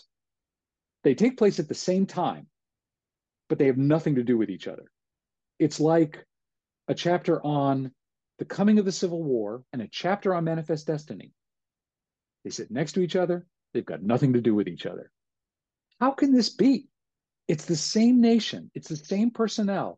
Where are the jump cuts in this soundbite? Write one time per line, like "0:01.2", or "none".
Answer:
0:09.6